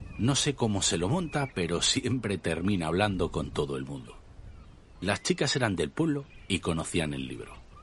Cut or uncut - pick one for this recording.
uncut